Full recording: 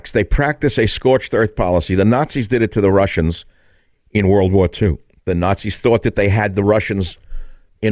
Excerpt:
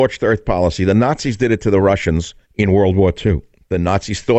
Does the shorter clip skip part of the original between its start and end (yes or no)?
yes